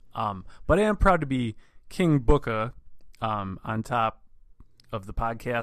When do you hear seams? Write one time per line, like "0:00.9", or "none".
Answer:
none